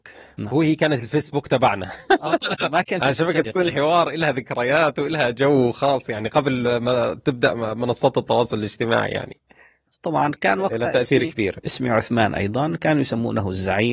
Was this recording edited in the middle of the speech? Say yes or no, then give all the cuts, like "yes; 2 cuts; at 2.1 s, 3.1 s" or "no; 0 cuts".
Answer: yes; 1 cut; at 3.4 s